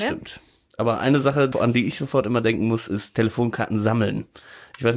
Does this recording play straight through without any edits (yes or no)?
no